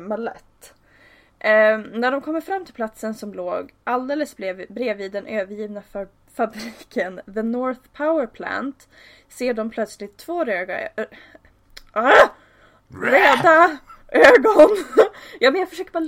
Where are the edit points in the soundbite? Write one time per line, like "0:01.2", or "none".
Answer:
none